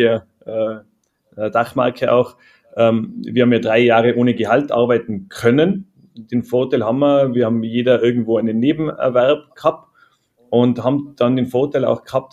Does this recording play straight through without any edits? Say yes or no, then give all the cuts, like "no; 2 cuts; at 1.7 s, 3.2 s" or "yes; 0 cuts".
yes; 0 cuts